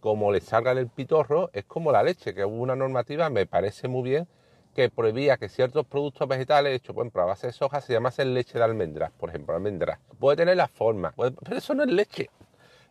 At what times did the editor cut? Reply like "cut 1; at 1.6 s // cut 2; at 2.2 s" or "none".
cut 1; at 10.1 s // cut 2; at 11.1 s